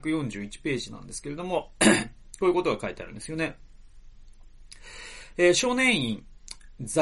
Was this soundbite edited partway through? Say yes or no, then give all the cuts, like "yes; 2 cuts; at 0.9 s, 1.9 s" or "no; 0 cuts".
no; 0 cuts